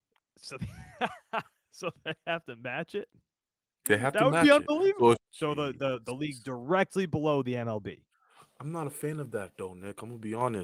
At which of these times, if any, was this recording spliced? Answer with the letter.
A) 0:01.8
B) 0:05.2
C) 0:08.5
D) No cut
B